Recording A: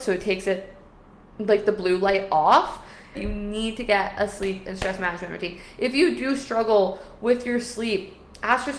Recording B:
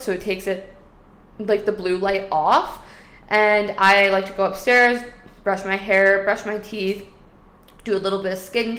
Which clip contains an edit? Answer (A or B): A